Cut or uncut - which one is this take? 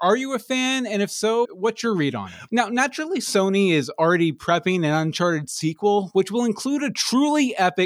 cut